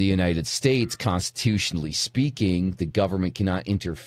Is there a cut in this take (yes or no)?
no